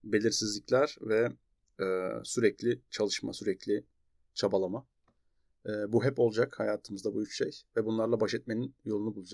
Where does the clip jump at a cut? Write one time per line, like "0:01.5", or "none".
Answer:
none